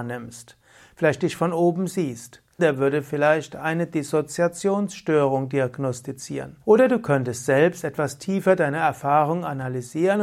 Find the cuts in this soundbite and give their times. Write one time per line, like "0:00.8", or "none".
0:02.6
0:06.6